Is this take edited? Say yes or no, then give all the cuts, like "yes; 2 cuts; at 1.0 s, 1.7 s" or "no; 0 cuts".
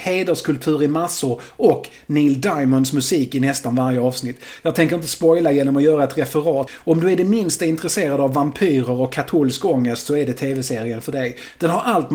yes; 1 cut; at 6.7 s